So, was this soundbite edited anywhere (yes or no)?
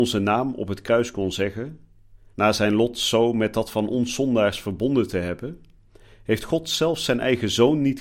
yes